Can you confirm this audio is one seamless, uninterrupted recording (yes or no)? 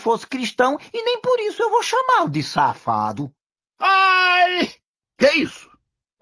yes